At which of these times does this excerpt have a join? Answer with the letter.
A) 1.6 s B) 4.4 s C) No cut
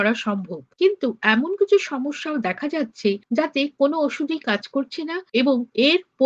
A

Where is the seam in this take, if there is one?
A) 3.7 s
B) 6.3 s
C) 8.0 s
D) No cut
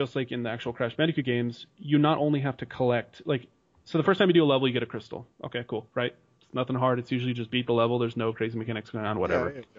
D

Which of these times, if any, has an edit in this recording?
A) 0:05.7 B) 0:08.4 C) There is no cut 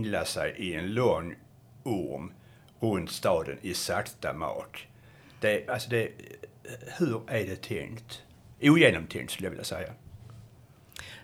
A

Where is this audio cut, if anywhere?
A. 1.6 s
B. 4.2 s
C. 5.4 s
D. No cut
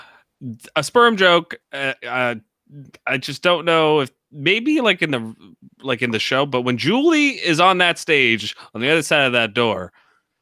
A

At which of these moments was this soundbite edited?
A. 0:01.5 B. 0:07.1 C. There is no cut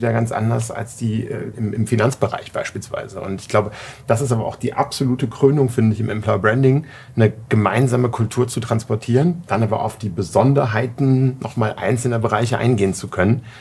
A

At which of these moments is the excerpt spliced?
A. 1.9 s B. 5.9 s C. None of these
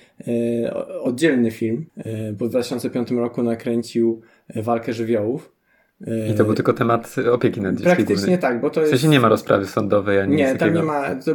A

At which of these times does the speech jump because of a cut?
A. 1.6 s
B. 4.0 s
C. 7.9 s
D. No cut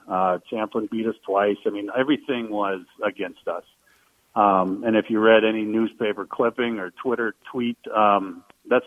D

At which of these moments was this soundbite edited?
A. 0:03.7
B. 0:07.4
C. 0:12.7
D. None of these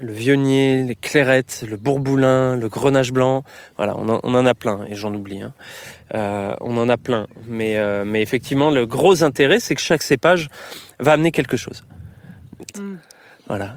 C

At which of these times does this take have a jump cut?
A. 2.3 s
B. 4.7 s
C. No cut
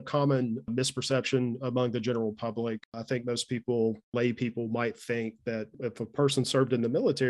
C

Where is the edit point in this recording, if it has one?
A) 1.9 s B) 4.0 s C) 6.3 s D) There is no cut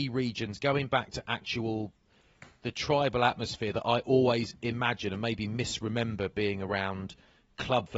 D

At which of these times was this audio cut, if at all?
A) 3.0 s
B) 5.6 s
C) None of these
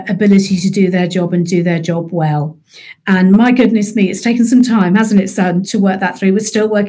B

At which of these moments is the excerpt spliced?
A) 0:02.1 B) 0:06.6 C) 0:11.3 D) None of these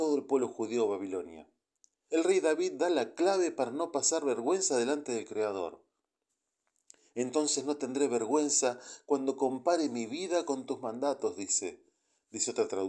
A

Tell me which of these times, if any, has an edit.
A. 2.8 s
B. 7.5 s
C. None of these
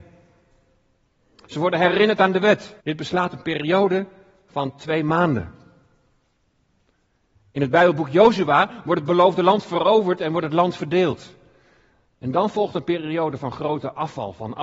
A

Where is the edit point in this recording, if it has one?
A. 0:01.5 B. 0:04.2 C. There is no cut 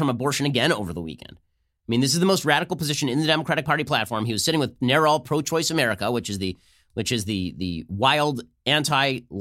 C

